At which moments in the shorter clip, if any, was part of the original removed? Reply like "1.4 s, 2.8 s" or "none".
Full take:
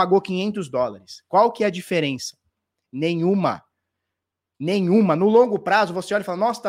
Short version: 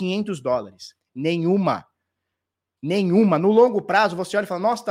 1.0 s